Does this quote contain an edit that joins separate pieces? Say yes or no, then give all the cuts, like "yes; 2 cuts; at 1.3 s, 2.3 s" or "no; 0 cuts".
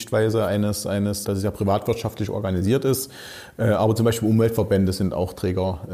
yes; 1 cut; at 1.2 s